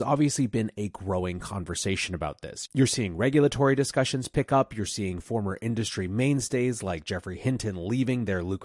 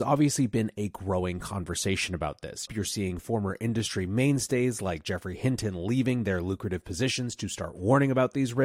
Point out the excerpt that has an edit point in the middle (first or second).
second